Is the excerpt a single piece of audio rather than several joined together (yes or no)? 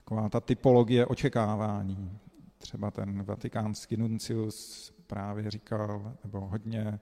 yes